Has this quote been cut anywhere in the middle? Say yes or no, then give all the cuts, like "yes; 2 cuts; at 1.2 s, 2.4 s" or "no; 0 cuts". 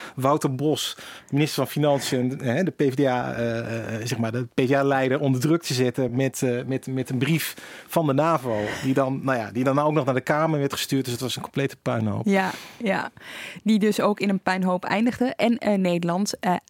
no; 0 cuts